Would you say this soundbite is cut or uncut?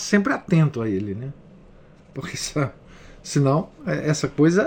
uncut